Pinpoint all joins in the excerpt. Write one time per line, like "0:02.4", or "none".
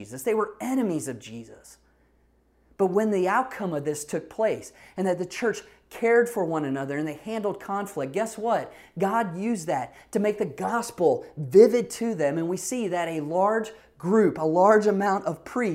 none